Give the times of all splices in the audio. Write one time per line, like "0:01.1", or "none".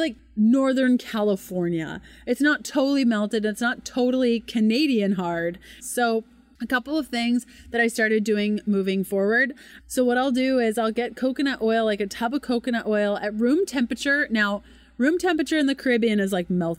0:05.8
0:09.8